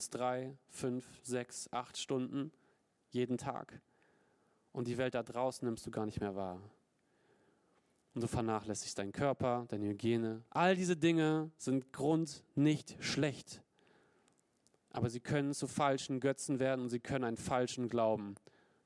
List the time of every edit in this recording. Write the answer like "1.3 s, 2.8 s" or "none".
10.5 s

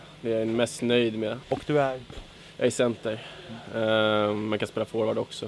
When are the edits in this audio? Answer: 1.4 s

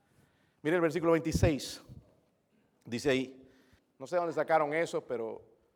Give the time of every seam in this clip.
3.8 s

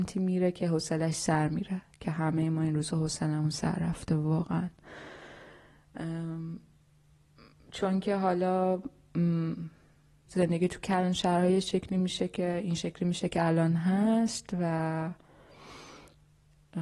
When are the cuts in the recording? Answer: 10.3 s

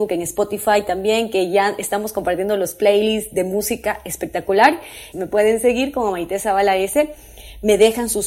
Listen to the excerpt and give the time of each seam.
5.1 s

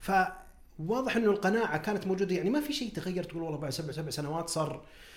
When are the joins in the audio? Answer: 3.9 s

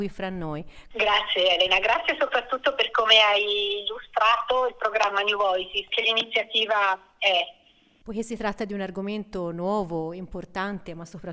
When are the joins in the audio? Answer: 0.9 s, 5.9 s, 8.0 s

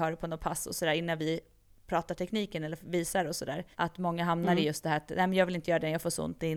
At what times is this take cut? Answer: 3.7 s

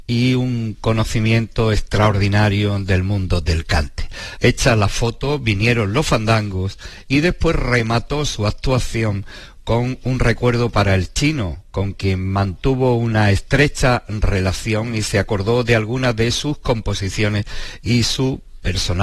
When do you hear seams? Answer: 4.4 s

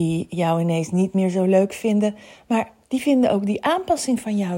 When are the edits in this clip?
none

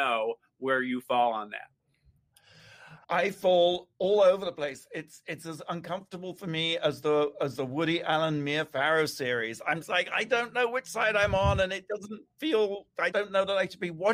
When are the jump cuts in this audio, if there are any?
3.0 s, 9.8 s, 13.1 s

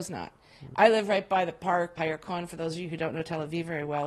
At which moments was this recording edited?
2.0 s

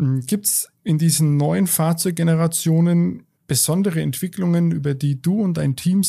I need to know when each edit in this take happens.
3.3 s

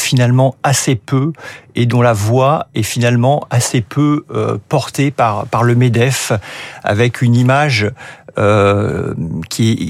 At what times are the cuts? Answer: none

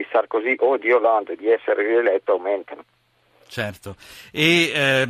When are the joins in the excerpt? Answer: none

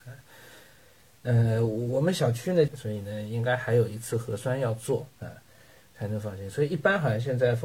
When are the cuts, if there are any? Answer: 2.7 s, 5.8 s

